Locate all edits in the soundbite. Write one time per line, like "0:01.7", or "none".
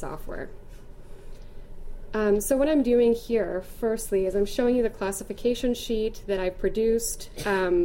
none